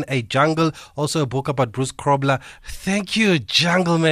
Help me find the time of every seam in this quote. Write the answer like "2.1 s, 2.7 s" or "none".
2.6 s